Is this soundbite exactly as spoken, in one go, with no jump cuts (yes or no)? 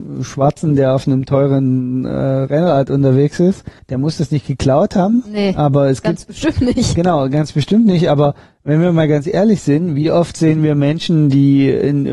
yes